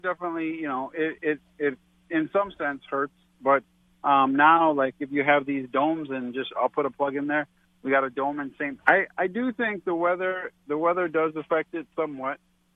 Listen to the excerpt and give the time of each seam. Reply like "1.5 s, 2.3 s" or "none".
8.8 s